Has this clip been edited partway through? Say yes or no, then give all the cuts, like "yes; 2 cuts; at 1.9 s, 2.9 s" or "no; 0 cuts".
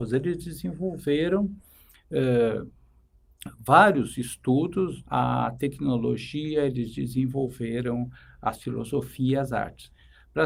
yes; 1 cut; at 5.0 s